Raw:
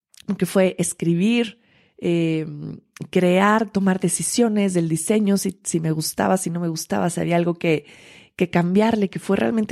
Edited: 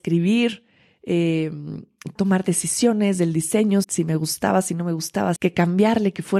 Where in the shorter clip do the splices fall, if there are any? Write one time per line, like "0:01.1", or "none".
0:02.2
0:03.8
0:05.4